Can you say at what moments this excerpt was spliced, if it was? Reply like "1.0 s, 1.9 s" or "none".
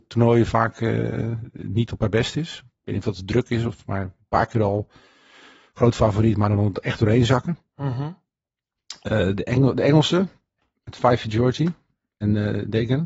none

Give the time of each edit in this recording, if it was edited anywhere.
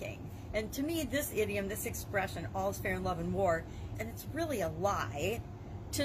3.9 s

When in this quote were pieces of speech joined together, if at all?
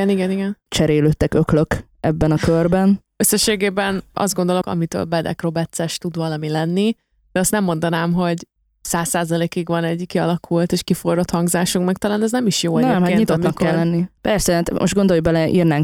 4.6 s, 14.2 s

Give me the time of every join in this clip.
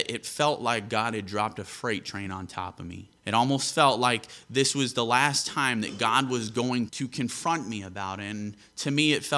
3.2 s, 6.9 s

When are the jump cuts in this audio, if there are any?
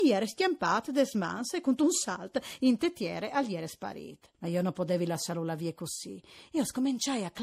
4.3 s

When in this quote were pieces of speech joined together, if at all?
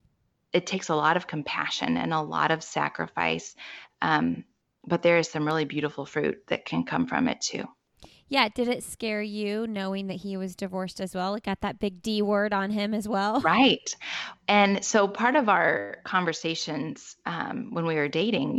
none

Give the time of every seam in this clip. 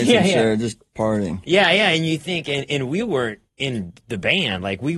3.5 s

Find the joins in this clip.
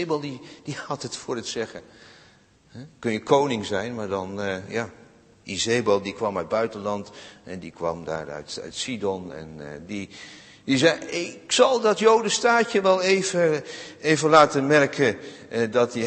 none

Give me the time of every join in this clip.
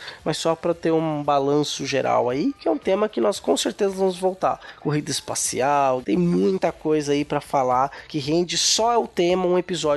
6.0 s

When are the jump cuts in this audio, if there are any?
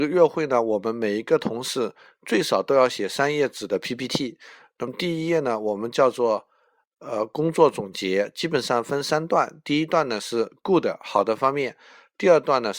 none

